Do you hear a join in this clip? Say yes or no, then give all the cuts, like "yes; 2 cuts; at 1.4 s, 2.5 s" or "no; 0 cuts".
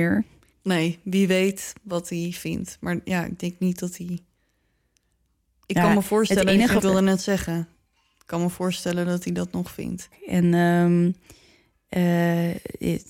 yes; 2 cuts; at 6.8 s, 10.1 s